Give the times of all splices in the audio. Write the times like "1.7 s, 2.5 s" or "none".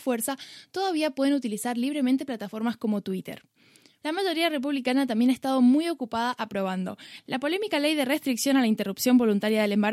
4.0 s